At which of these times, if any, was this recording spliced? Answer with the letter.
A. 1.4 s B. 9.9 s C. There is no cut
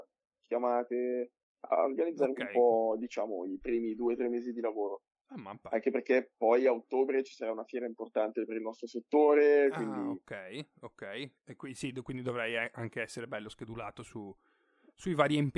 A